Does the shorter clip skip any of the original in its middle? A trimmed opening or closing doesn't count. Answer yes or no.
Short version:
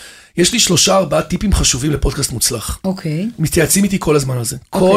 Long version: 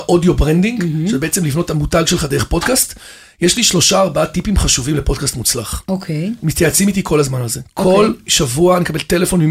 no